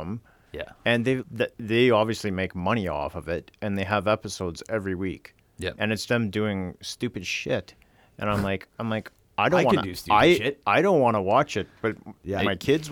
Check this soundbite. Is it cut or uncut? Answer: cut